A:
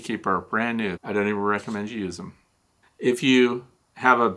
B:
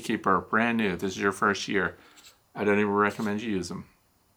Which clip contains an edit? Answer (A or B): A